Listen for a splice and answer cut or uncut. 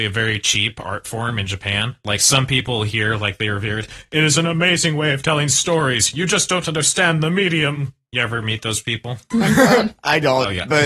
uncut